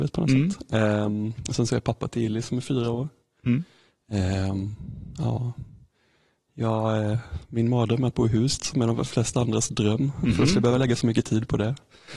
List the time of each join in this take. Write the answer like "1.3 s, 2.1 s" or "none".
none